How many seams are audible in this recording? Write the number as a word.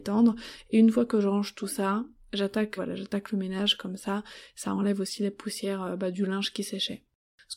one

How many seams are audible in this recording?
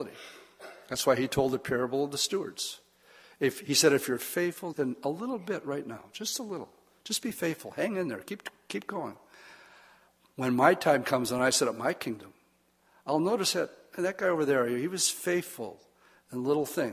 one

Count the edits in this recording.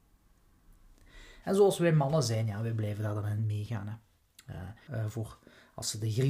two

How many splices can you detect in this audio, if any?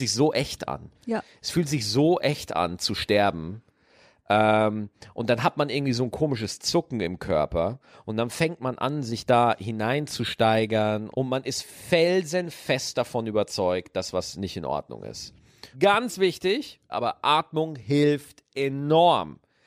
three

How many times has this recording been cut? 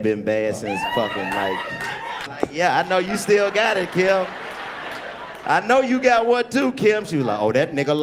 two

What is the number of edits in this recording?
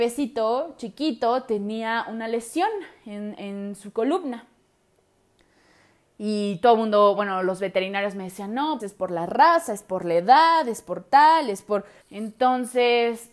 two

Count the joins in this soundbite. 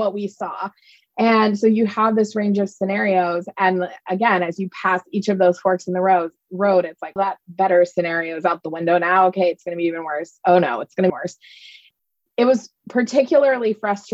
two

